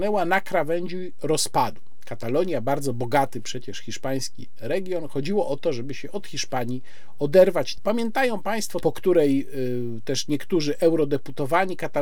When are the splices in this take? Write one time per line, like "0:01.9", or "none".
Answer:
0:07.8
0:08.8